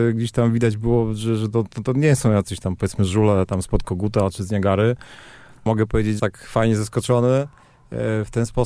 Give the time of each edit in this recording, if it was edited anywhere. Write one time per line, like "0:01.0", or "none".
0:01.9
0:06.2